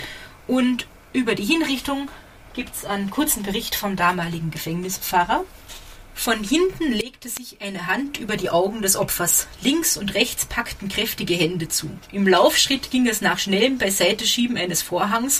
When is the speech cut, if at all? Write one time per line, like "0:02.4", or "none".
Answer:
none